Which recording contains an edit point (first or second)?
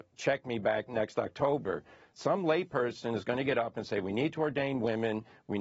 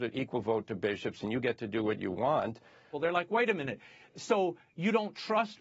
second